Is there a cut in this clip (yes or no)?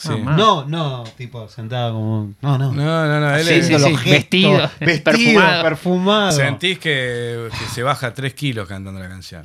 no